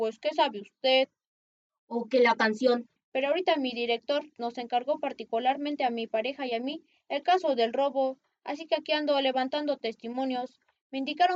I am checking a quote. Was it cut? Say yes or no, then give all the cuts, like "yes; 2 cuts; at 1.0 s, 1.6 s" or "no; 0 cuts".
yes; 2 cuts; at 3.0 s, 4.4 s